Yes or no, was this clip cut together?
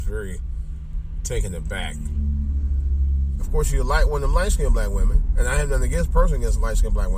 yes